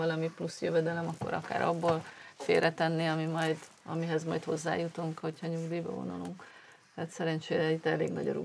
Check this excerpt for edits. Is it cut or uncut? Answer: uncut